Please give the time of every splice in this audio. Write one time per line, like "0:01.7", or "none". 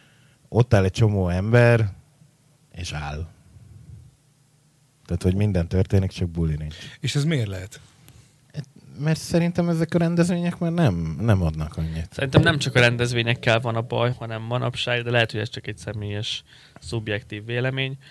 0:14.1